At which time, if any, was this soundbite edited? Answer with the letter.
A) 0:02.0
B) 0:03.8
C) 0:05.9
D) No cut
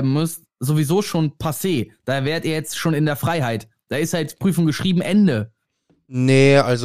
D